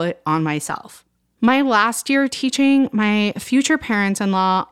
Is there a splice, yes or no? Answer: yes